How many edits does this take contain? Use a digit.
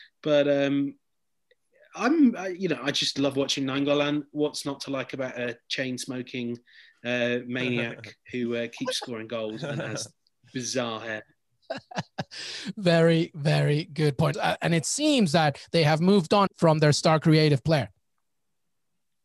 2